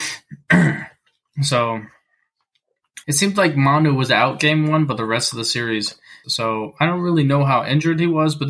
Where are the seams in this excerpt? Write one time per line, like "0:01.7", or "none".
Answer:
0:03.0
0:06.2